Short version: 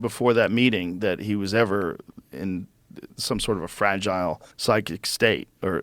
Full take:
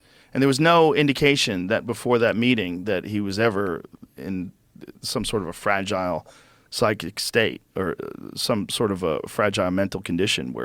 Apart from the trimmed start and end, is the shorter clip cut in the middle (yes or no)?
yes